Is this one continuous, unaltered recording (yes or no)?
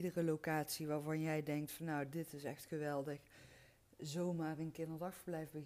yes